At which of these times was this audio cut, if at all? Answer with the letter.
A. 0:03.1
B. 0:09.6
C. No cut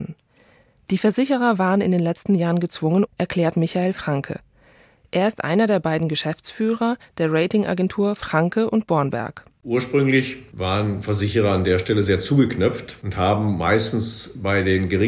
A